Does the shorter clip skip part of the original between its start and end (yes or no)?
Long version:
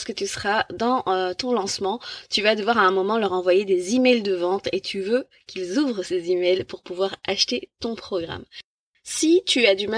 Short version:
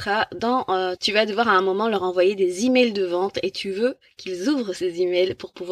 yes